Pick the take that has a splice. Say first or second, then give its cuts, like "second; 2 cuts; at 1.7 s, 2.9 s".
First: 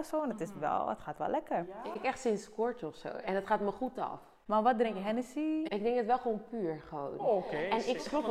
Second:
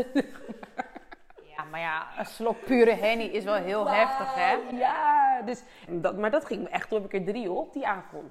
second; 1 cut; at 5.9 s